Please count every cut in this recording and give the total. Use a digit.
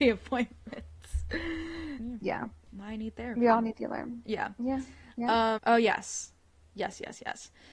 2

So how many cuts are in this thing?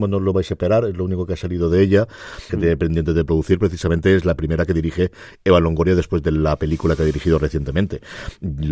1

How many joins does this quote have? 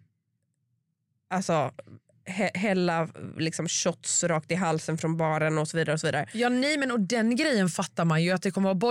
0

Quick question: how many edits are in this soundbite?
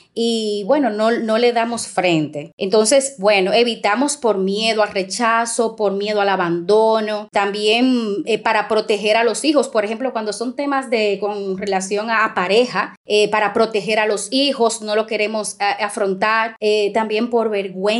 0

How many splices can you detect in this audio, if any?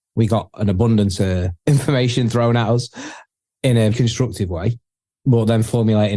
2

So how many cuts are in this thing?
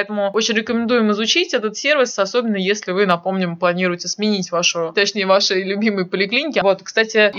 1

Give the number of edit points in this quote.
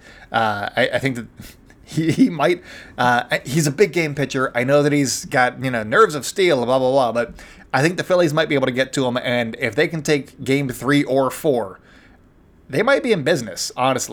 0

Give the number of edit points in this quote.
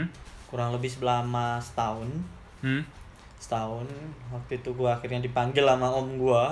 0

